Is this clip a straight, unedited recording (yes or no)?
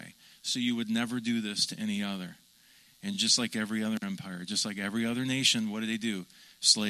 yes